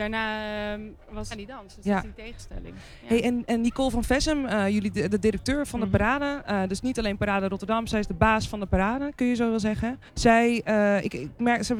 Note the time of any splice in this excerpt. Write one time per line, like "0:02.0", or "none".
0:01.3
0:10.1